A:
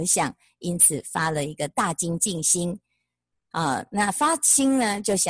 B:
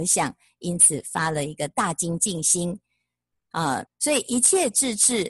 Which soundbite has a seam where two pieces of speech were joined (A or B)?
B